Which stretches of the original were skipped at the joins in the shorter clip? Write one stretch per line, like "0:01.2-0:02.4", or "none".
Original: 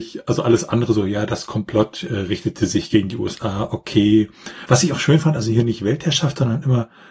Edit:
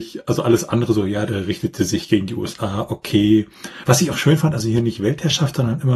0:01.3-0:02.1